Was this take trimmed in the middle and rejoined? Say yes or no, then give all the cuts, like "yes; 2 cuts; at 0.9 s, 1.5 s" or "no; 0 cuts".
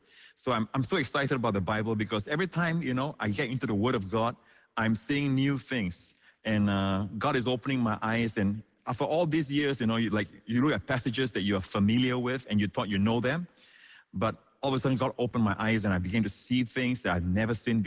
no; 0 cuts